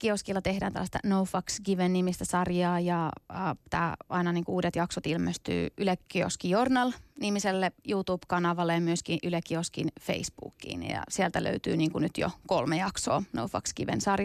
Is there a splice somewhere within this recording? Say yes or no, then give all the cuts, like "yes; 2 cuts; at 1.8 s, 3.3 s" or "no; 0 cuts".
no; 0 cuts